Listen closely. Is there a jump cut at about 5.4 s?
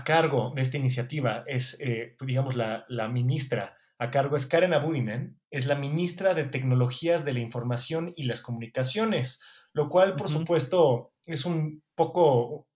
yes; 1 cut; at 5.4 s

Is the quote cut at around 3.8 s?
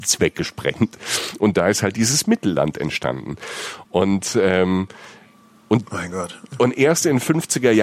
no; 0 cuts

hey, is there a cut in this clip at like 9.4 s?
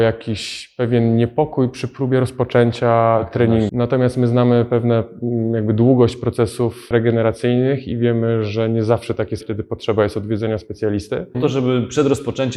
yes; 3 cuts; at 3.7 s, 9.4 s, 11.3 s

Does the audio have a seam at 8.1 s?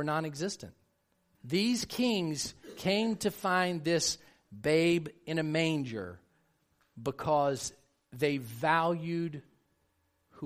no; 1 cut; at 1.3 s

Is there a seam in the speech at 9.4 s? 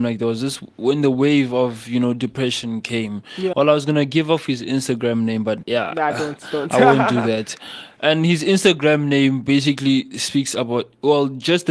no; 2 cuts; at 3.5 s, 5.6 s

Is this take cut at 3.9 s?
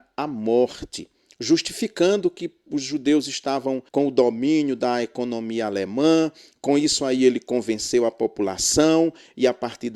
yes; 1 cut; at 3.9 s

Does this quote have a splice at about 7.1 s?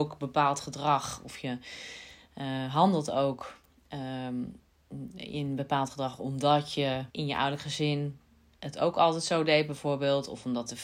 yes; 1 cut; at 7.1 s

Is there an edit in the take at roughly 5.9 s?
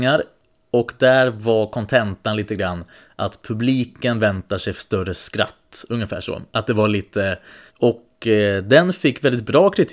no; 1 cut; at 7.7 s

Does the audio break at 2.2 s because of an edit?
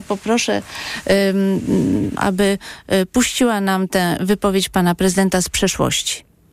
yes; 1 cut; at 2.2 s

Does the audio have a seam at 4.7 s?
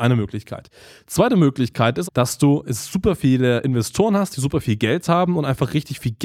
no; 1 cut; at 2.1 s

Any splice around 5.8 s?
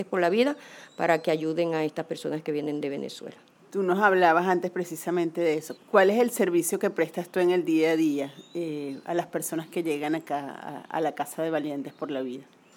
yes; 1 cut; at 5.8 s

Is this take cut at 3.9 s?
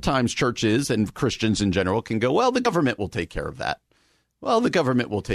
no; 0 cuts

